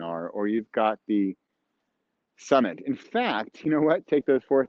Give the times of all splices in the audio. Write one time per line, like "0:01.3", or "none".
none